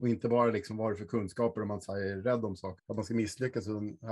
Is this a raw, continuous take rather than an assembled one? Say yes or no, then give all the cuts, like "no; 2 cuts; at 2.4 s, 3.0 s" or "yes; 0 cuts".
no; 1 cut; at 2.8 s